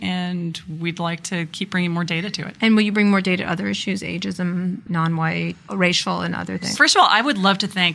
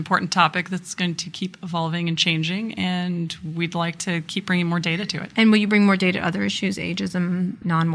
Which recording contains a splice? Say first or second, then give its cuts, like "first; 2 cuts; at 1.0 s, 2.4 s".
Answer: first; 1 cut; at 6.7 s